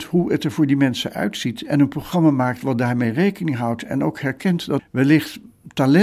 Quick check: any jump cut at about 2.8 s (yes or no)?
no